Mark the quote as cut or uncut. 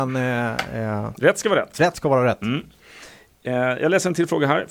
uncut